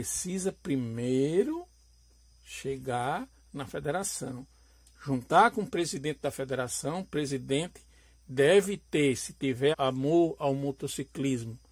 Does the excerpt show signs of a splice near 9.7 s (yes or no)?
yes